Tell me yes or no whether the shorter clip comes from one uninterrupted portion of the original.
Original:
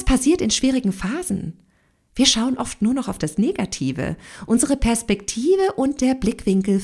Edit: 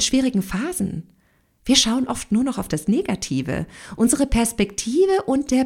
yes